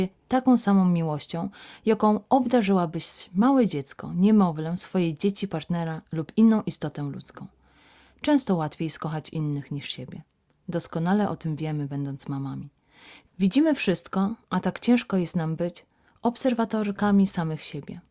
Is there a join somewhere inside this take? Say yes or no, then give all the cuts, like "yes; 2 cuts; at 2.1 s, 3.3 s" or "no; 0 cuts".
no; 0 cuts